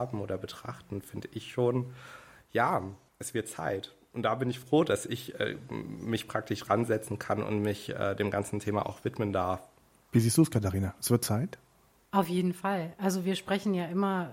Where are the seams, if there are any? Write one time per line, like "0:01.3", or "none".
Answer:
none